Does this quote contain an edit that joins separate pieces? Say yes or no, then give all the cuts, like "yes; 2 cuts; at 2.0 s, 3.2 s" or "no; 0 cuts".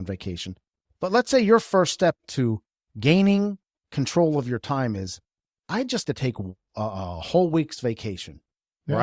yes; 1 cut; at 6.0 s